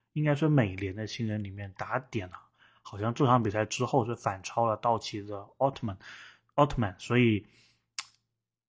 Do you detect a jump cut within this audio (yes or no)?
no